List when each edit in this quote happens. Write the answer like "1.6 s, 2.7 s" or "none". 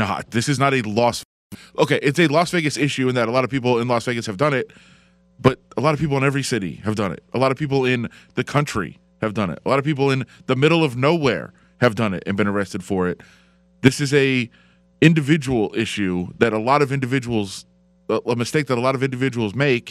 none